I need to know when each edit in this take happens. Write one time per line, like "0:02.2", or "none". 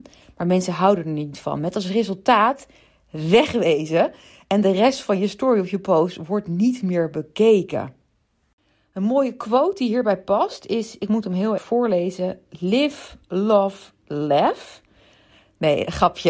0:11.6